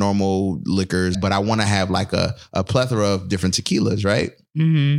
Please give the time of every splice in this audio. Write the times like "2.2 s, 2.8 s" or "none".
1.1 s